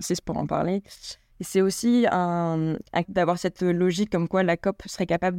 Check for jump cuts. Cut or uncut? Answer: cut